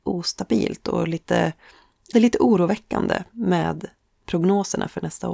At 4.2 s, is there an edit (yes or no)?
yes